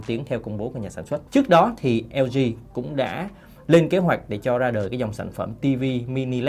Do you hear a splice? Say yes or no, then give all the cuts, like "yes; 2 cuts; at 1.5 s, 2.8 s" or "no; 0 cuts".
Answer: yes; 1 cut; at 1.3 s